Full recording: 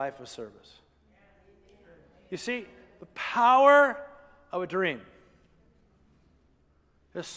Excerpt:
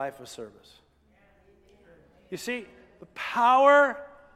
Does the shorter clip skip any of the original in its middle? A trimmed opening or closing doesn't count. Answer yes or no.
no